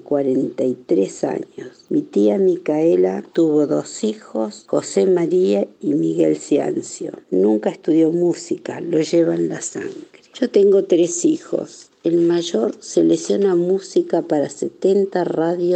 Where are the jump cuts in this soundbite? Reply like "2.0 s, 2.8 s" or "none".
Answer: 7.2 s